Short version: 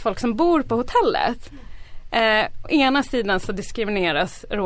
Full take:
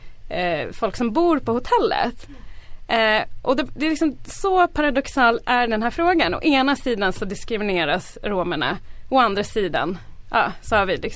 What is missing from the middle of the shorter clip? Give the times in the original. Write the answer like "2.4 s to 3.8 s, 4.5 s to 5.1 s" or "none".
3.4 s to 6.4 s